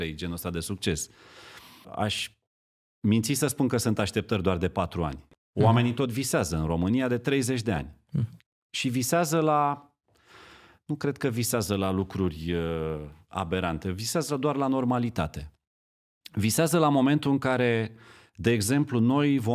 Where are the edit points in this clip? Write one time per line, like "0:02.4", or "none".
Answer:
none